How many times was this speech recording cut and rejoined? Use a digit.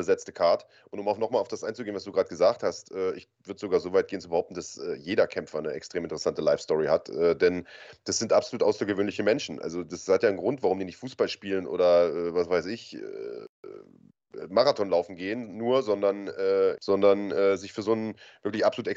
1